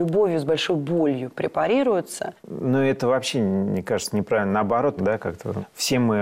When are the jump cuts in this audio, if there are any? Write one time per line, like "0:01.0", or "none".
0:02.4
0:05.0